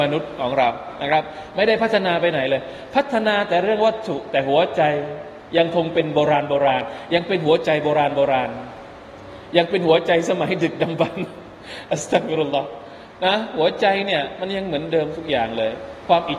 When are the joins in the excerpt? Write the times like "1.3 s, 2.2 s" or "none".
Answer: 5.5 s